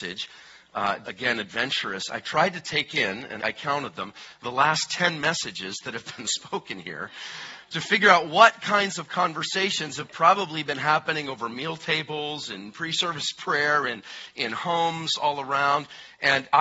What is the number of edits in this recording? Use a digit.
2